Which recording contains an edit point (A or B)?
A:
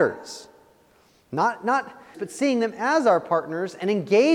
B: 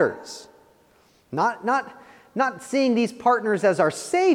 A